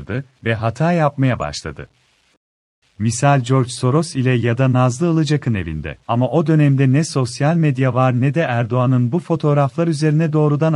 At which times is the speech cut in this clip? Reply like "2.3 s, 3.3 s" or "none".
2.8 s, 6.0 s